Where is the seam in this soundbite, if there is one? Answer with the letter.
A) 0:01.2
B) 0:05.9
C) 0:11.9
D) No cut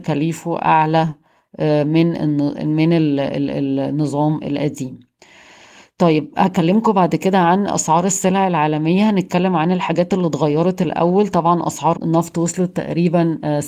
C